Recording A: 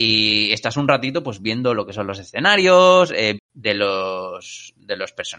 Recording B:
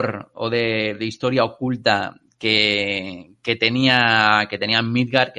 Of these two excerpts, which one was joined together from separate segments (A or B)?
A